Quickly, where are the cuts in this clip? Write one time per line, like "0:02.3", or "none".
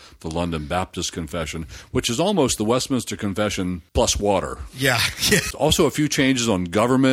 0:03.9
0:05.5